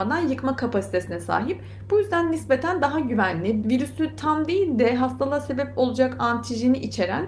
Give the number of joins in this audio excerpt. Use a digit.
1